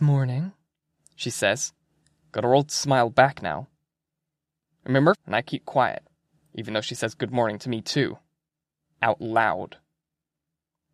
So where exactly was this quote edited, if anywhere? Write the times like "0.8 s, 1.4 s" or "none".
5.1 s